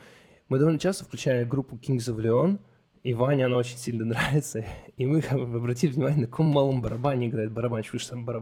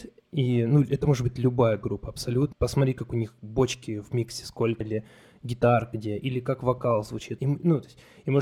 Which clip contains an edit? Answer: second; 3 cuts; at 2.5 s, 4.8 s, 7.4 s

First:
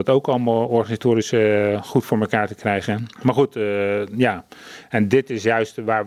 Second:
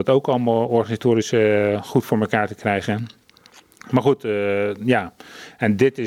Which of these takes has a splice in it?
first; 1 cut; at 3.1 s

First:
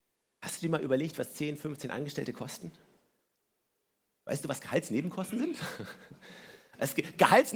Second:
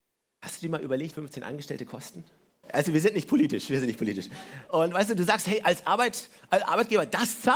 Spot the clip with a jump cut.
second; 3 cuts; at 1.1 s, 2.6 s, 4.7 s

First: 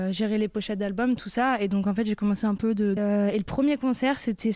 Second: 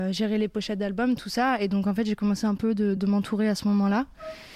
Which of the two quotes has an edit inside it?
first; 1 cut; at 3.0 s

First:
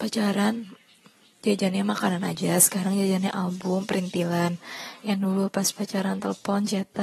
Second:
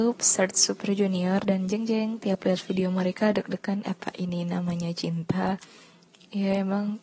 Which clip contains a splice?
second; 1 cut; at 3.8 s

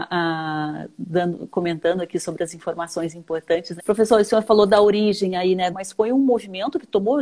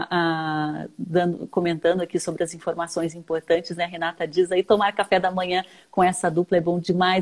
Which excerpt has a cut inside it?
first; 2 cuts; at 3.8 s, 5.7 s

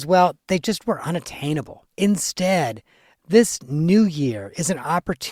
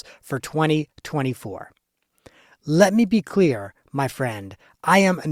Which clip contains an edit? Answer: first; 1 cut; at 1.9 s

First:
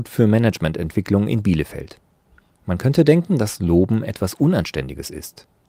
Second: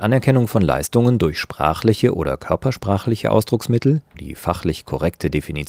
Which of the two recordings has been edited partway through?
second; 1 cut; at 4.1 s

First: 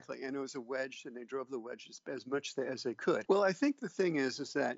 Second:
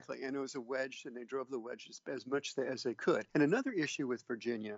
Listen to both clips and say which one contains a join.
first; 1 cut; at 3.3 s

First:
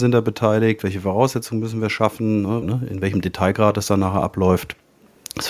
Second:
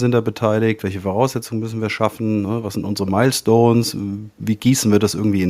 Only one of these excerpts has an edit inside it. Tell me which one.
first; 1 cut; at 2.6 s

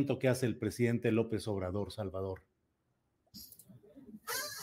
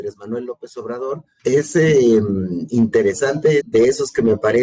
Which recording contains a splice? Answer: second; 2 cuts; at 1.4 s, 3.6 s

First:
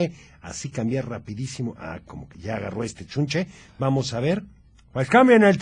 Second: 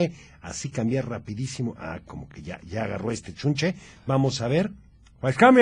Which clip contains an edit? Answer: first; 1 cut; at 2.3 s

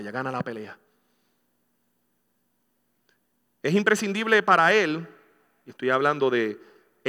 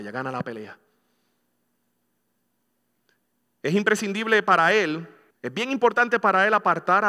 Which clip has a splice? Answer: second; 1 cut; at 5.3 s

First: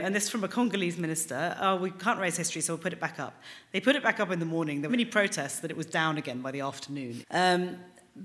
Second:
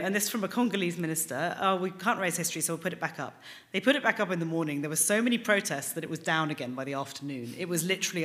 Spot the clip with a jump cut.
first; 2 cuts; at 4.9 s, 7.2 s

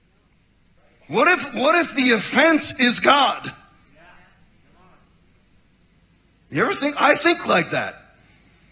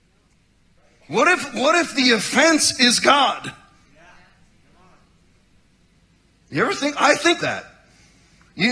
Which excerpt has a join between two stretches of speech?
second; 1 cut; at 7.4 s

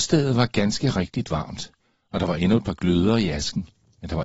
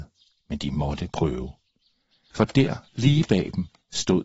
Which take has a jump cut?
second; 1 cut; at 2.3 s

